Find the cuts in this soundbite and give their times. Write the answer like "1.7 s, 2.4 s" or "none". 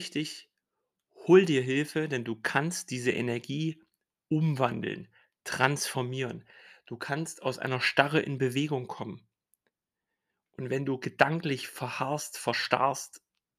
none